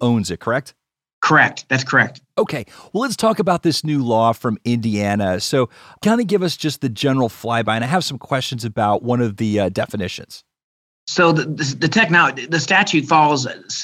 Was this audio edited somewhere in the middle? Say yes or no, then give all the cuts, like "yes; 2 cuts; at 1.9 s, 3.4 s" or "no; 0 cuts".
no; 0 cuts